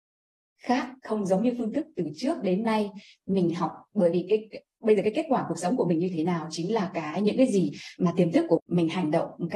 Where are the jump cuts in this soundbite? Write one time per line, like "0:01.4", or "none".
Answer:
0:08.6

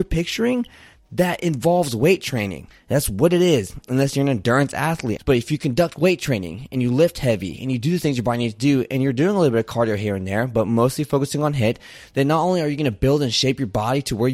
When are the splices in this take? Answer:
0:02.7
0:05.2

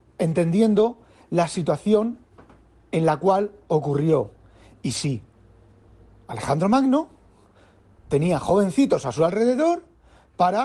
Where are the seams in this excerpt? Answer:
none

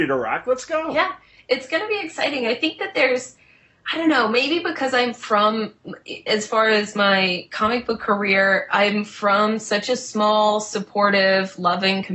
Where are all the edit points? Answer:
none

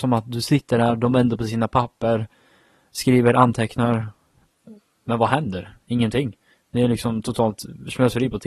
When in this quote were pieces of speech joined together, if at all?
none

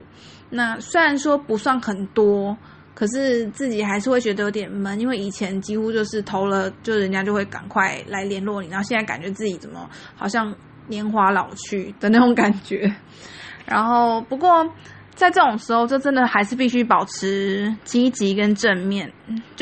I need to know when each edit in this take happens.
none

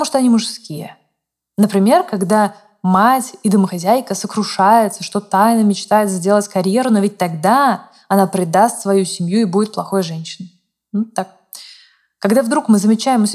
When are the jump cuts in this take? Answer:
none

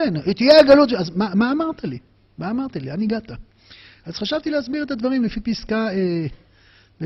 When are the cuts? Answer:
none

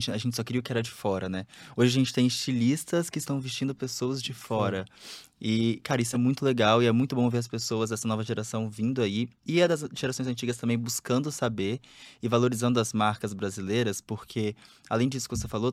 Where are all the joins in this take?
none

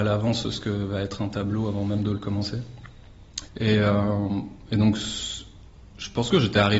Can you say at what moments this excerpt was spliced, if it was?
0:03.5

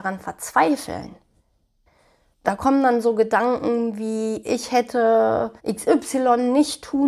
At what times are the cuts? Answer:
0:05.6

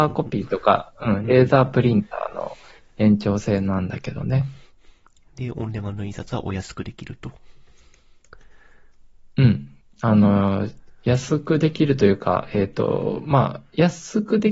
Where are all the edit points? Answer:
none

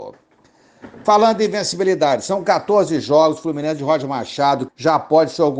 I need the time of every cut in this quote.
0:04.7

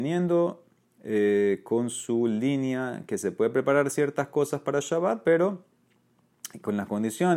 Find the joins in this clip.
none

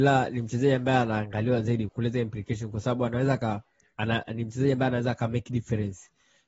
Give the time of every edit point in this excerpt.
0:01.9

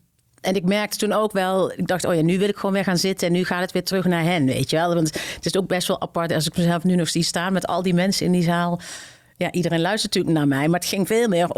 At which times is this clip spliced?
none

